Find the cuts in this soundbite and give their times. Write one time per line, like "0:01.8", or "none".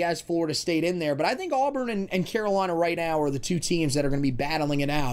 none